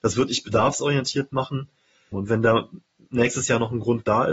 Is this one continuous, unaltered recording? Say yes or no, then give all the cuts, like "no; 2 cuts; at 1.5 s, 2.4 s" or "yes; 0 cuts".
no; 1 cut; at 2.1 s